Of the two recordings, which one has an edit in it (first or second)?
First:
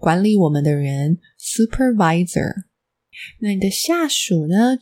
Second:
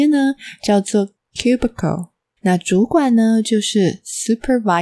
second